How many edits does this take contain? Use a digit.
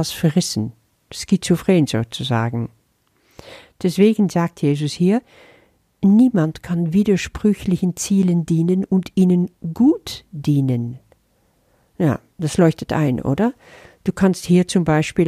0